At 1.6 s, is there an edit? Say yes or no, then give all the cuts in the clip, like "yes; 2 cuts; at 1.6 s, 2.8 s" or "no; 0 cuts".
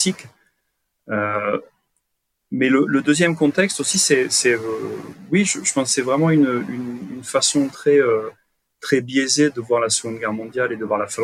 no; 0 cuts